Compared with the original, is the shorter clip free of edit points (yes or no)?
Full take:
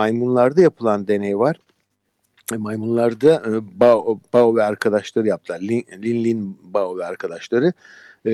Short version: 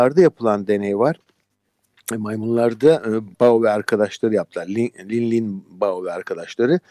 no